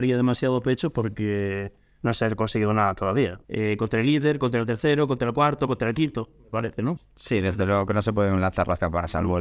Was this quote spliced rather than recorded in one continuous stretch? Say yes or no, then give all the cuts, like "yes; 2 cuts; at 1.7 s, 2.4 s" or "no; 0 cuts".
yes; 2 cuts; at 3.4 s, 7.0 s